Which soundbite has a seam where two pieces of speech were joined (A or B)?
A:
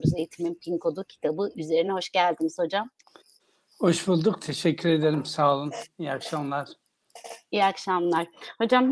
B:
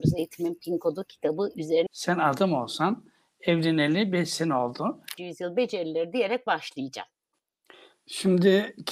B